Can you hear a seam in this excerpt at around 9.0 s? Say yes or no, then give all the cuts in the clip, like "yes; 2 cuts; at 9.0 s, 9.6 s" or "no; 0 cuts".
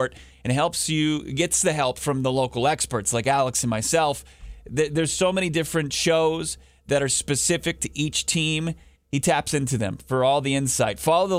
yes; 1 cut; at 9.0 s